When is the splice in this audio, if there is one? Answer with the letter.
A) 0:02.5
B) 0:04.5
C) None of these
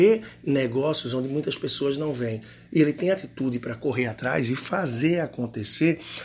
C